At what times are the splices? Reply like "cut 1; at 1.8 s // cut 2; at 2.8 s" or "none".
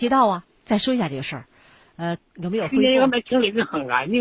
cut 1; at 2.2 s